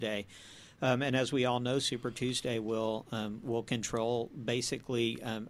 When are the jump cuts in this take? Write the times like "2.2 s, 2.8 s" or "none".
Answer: none

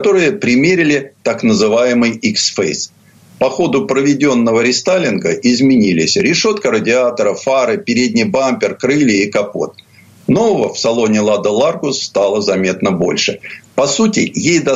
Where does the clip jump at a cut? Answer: none

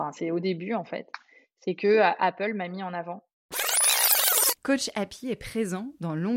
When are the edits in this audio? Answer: 4.6 s

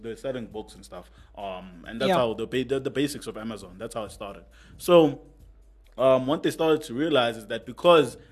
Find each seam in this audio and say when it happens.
none

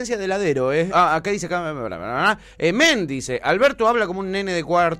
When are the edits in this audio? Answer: 0.9 s

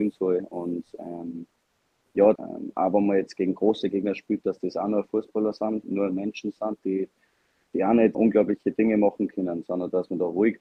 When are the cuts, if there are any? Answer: 2.4 s, 8.1 s

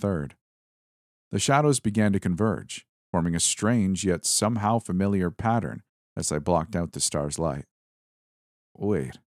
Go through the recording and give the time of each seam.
none

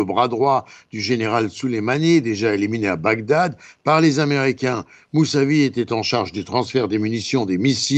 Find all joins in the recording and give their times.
none

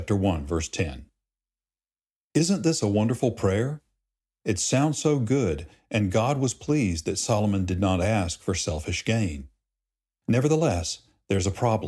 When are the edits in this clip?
none

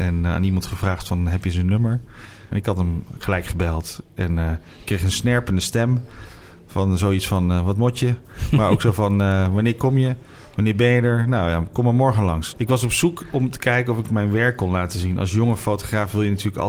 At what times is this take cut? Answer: 2.5 s, 12.5 s

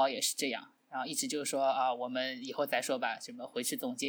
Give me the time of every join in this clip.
none

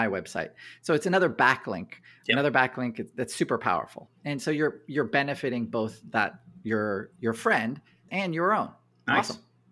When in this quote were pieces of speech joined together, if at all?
8.1 s

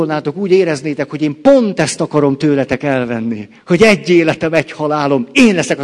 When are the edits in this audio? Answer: none

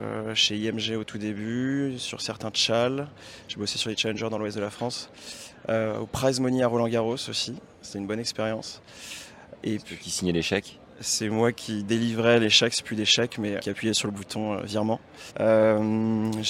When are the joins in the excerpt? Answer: 13.6 s, 15.3 s

